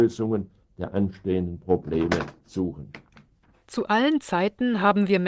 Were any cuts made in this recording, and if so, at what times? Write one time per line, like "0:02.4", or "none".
0:03.5